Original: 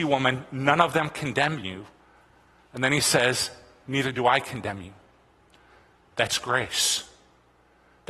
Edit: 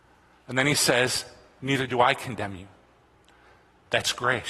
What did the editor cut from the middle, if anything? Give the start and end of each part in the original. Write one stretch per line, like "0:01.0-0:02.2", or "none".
none